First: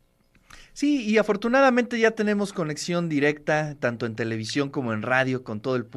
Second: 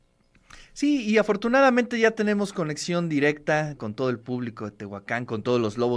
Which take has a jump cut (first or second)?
second